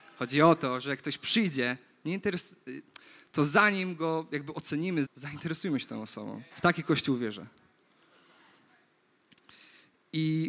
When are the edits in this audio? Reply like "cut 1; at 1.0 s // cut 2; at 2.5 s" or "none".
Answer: cut 1; at 5.0 s // cut 2; at 6.5 s